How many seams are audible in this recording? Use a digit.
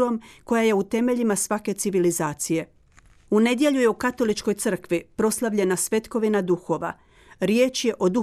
0